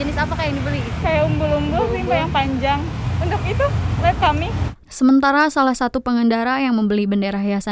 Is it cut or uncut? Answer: cut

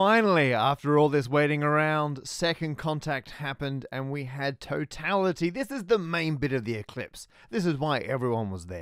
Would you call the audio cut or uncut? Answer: uncut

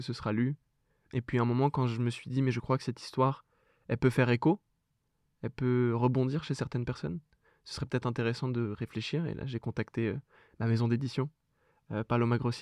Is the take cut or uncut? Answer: uncut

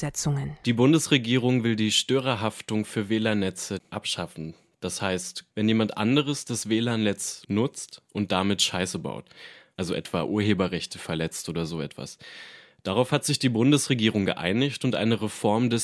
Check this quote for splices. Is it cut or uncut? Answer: cut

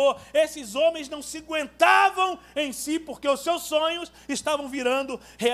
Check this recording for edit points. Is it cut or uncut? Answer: uncut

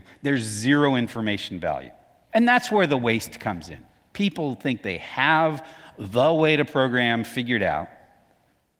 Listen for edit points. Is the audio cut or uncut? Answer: cut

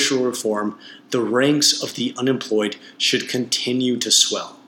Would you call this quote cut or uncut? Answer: uncut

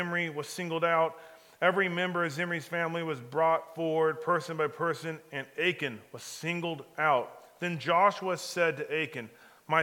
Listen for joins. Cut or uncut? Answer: uncut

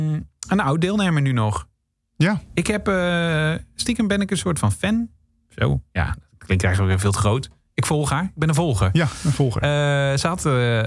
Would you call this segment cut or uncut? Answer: uncut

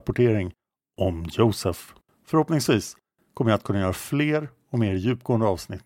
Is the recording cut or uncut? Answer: uncut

